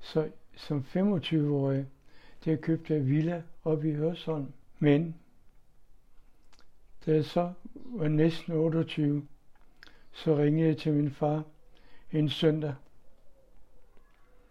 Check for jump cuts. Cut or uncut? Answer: cut